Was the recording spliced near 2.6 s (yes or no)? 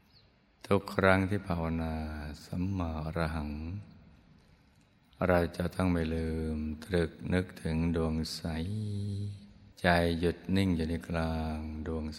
no